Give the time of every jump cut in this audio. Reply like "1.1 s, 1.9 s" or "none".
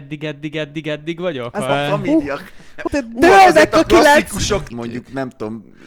1.7 s, 2.9 s, 4.7 s

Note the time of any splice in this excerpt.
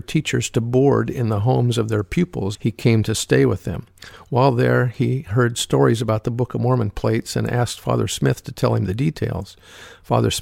2.6 s

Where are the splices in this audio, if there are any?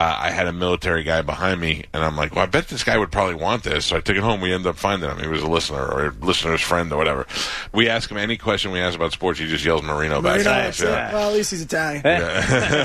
7.7 s

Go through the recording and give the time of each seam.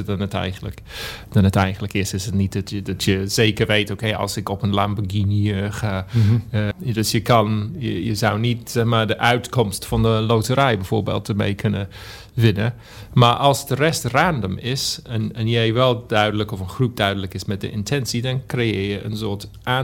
6.7 s

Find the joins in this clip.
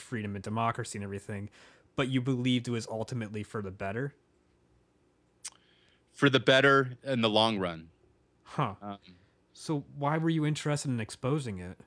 none

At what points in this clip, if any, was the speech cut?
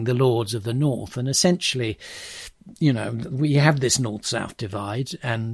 none

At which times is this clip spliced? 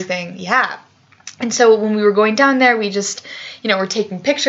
none

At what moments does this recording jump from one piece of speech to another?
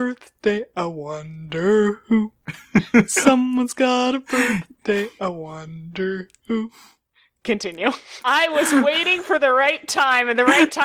8.2 s

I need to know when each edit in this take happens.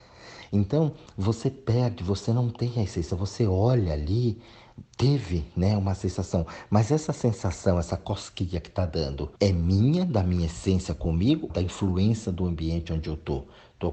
4.9 s, 9.4 s, 11.5 s

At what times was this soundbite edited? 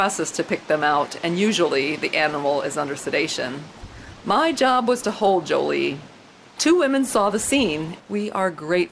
6.5 s, 8.0 s

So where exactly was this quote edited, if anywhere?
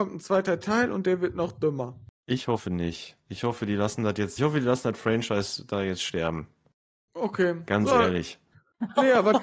4.4 s

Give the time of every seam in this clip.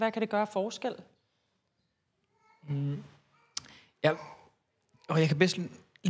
none

